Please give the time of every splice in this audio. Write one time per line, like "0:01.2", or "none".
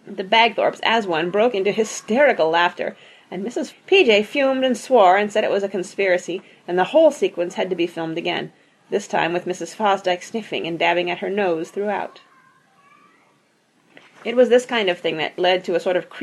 0:03.7